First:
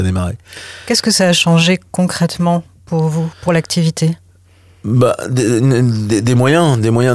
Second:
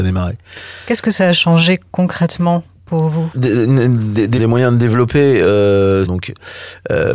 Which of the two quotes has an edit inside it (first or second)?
second